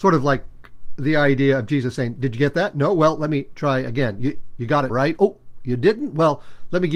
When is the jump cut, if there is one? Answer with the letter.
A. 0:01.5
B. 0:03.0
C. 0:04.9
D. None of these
C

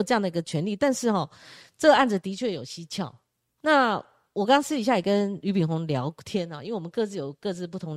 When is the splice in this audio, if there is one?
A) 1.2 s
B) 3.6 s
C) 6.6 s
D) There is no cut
B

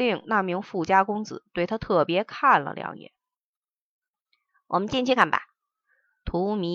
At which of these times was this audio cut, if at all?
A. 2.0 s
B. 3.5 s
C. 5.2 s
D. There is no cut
C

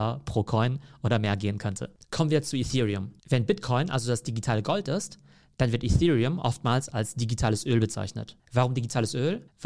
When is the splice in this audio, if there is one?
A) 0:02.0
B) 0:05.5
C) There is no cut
A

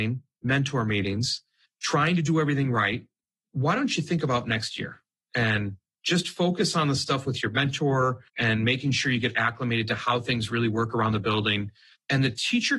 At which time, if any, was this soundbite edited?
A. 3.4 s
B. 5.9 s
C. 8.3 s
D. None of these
C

